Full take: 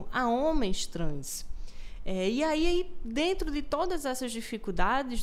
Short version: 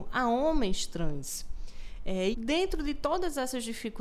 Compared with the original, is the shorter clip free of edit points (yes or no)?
no